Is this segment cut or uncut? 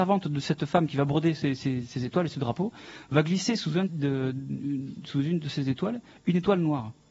cut